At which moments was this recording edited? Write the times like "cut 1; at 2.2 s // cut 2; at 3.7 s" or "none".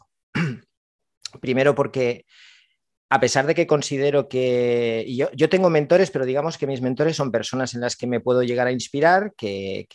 none